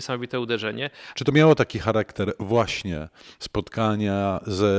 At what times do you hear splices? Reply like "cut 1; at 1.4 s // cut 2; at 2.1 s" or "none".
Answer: cut 1; at 1.1 s